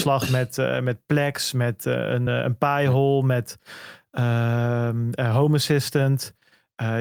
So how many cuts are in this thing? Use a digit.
0